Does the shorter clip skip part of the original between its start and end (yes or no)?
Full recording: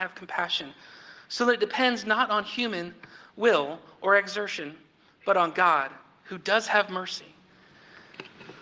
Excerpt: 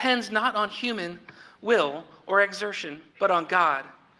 yes